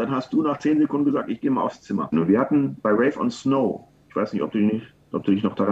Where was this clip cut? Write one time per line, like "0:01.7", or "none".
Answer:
0:02.1

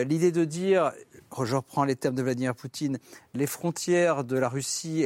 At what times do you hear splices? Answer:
none

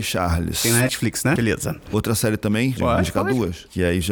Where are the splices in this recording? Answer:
0:01.4
0:02.8

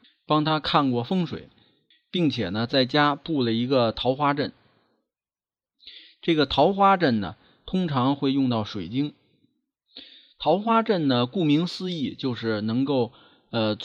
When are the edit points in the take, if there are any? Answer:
none

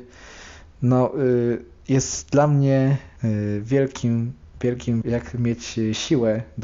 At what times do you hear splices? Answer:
0:03.2
0:05.0

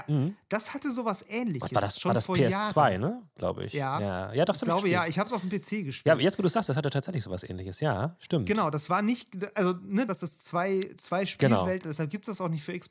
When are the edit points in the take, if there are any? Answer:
0:10.1
0:11.8

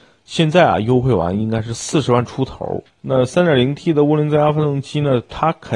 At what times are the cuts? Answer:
0:02.9

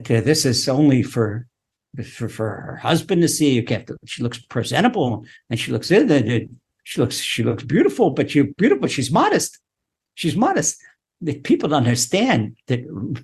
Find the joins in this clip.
none

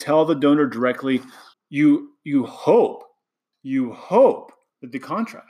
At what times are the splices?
0:01.5

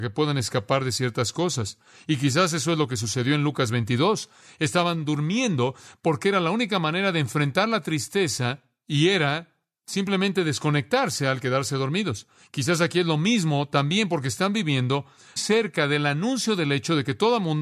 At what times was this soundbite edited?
0:15.4

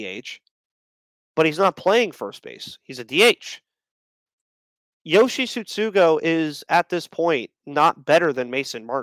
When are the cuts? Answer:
none

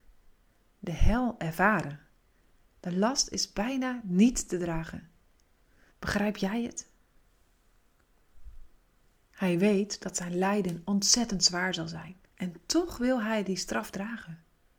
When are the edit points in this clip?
0:05.9
0:09.2
0:12.2

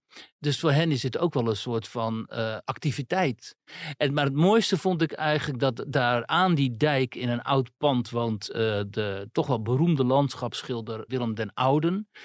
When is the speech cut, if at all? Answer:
0:11.1

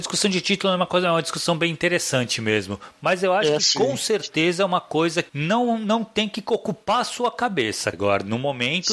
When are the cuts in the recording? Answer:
0:05.3
0:07.9

